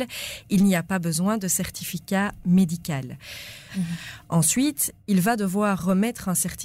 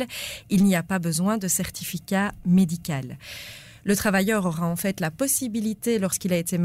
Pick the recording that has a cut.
first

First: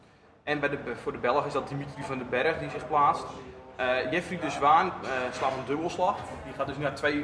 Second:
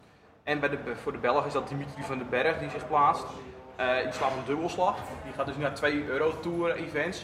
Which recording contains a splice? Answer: second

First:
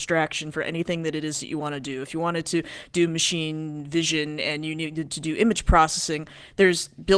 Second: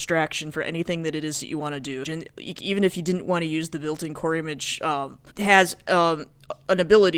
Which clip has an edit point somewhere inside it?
second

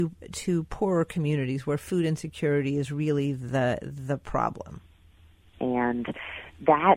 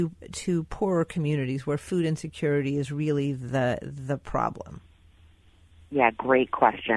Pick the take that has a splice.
first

